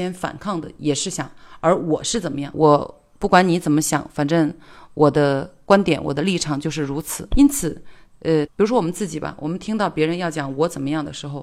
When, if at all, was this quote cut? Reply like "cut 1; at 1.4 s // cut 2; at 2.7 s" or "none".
cut 1; at 2.5 s // cut 2; at 7.3 s // cut 3; at 8.5 s